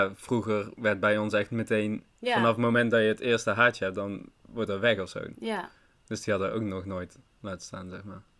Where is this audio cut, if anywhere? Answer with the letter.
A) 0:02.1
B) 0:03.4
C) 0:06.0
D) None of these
A